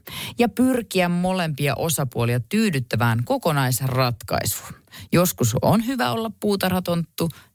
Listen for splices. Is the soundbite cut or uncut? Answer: uncut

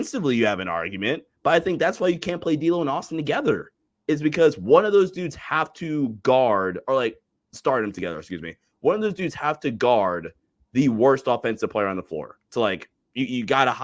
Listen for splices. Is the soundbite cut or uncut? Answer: uncut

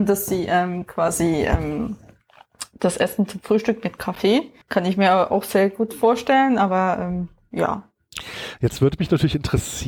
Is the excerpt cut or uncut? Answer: cut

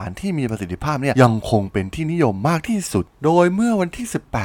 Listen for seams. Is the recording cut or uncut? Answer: cut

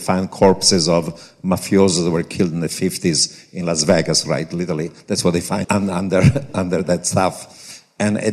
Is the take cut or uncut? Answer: cut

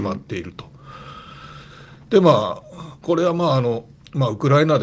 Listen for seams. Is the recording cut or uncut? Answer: uncut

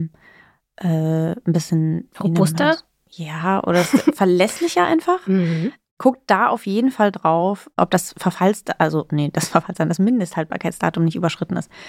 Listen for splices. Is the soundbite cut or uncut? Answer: uncut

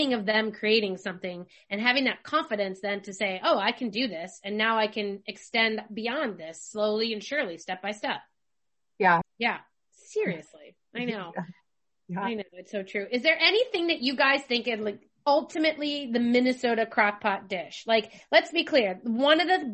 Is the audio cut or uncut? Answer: cut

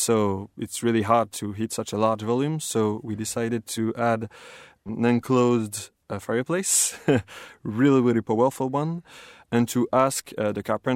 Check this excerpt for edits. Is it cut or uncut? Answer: uncut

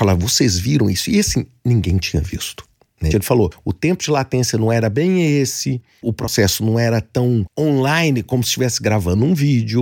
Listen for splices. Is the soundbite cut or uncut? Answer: cut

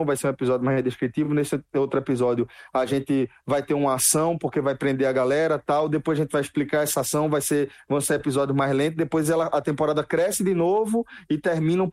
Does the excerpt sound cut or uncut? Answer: uncut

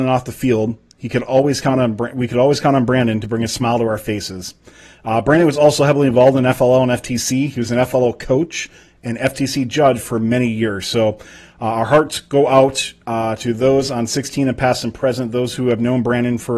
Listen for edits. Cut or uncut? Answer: uncut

